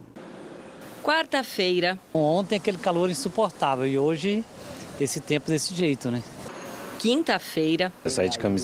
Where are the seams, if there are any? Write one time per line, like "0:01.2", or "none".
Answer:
none